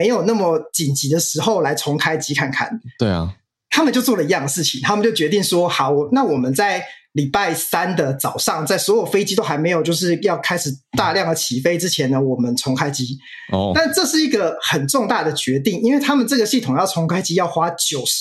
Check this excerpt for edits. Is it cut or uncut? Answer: uncut